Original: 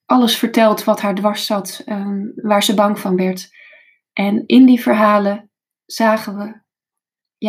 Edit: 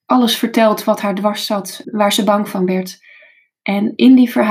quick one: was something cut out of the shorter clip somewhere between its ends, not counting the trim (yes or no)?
yes